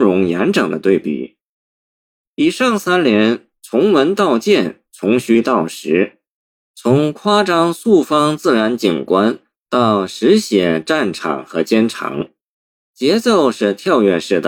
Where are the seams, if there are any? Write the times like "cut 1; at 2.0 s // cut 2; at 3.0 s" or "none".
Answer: none